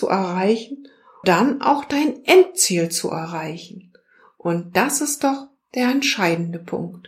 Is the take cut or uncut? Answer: cut